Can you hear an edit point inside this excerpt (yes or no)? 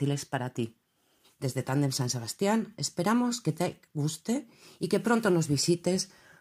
yes